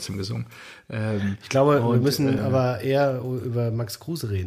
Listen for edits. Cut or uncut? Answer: uncut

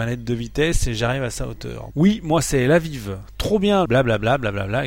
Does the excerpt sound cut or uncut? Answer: cut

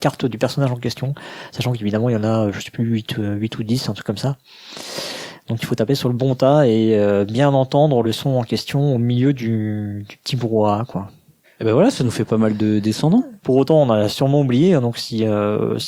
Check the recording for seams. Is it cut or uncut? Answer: cut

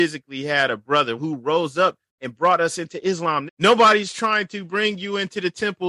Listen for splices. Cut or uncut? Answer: cut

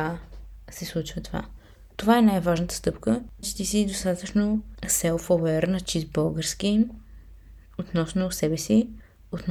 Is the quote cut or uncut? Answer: cut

